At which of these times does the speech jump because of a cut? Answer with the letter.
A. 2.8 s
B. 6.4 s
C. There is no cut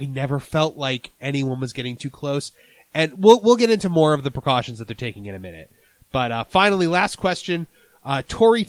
C